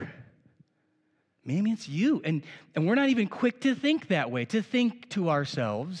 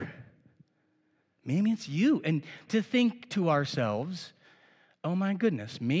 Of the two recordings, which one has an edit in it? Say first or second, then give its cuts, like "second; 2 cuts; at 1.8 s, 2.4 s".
second; 1 cut; at 2.7 s